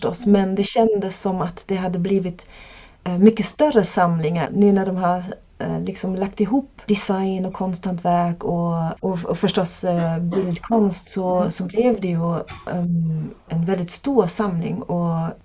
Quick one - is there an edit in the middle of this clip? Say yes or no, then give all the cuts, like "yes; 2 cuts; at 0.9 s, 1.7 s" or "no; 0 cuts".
yes; 2 cuts; at 4.5 s, 13.5 s